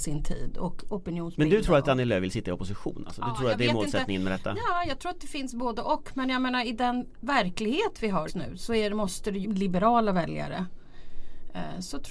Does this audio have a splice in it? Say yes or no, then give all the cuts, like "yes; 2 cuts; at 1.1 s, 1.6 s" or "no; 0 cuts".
yes; 2 cuts; at 8.3 s, 9.4 s